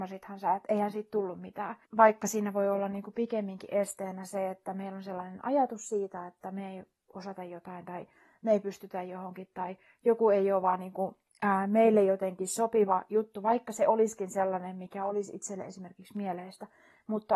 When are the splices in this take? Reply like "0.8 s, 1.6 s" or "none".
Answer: 1.8 s